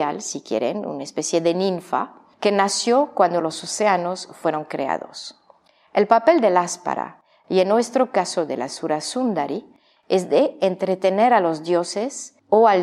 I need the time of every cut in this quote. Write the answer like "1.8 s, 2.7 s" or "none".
none